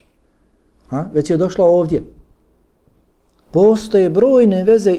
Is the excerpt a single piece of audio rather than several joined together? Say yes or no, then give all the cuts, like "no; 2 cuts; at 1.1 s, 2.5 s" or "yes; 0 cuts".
yes; 0 cuts